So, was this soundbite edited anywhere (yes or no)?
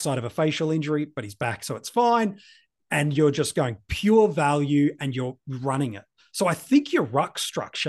no